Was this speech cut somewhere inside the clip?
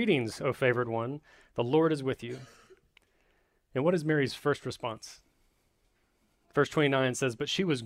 no; 0 cuts

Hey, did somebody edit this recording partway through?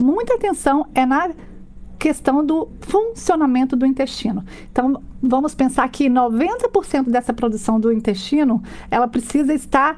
no; 0 cuts

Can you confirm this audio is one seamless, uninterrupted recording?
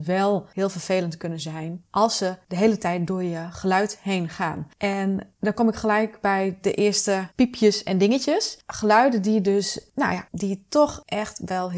no; 2 cuts; at 8.6 s, 10.3 s

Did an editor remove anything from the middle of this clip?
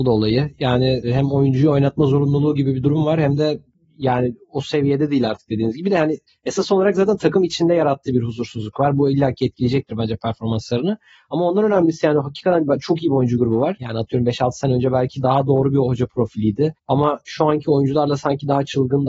yes; 2 cuts; at 13.8 s, 16.8 s

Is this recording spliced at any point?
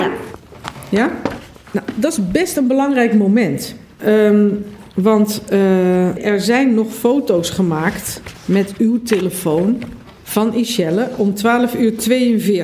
yes; 2 cuts; at 4.0 s, 6.2 s

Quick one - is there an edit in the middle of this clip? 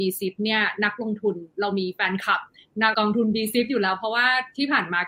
yes; 1 cut; at 2.9 s

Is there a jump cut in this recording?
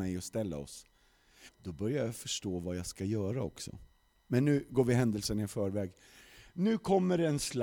yes; 1 cut; at 1.5 s

